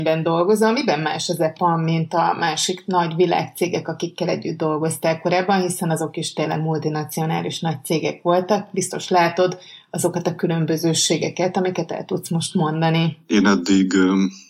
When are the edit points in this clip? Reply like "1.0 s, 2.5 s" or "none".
none